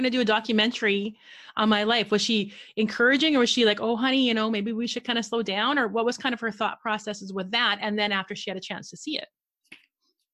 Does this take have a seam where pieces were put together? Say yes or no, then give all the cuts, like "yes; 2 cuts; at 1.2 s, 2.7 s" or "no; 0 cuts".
no; 0 cuts